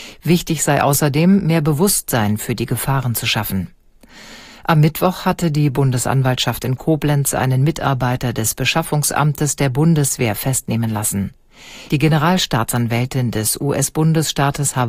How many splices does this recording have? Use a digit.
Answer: 1